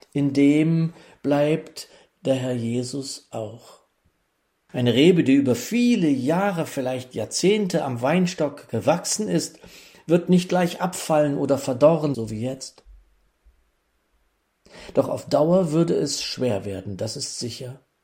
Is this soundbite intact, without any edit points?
no; 2 cuts; at 4.7 s, 12.1 s

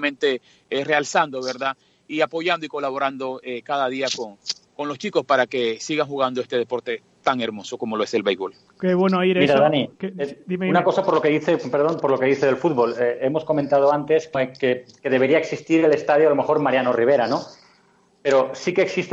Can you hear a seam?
yes; 1 cut; at 14.3 s

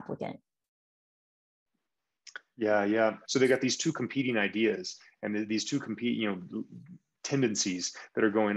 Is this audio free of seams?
no; 1 cut; at 3.3 s

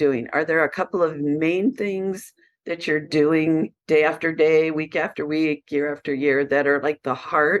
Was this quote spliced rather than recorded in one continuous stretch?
yes; 1 cut; at 3.8 s

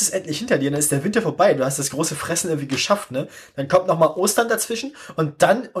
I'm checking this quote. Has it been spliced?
no; 0 cuts

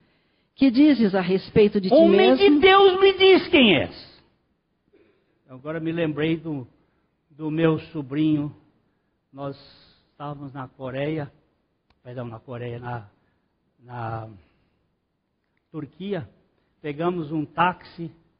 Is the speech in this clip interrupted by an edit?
no; 0 cuts

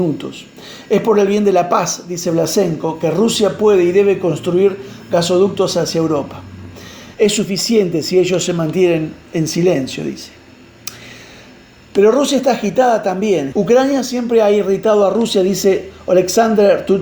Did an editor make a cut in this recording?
yes; 2 cuts; at 7.1 s, 13.5 s

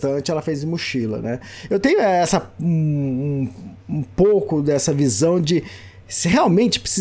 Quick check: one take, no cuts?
yes; 0 cuts

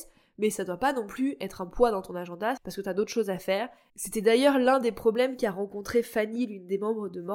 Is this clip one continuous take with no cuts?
no; 2 cuts; at 2.6 s, 3.9 s

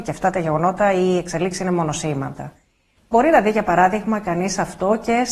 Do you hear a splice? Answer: yes; 1 cut; at 3.0 s

